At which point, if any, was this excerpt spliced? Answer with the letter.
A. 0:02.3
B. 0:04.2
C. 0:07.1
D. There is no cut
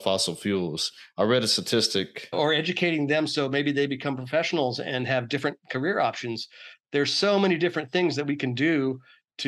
A